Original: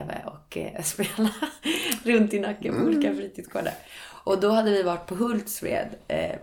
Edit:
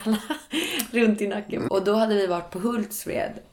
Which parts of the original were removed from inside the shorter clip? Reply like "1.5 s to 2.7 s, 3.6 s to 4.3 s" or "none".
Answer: 2.8 s to 4.2 s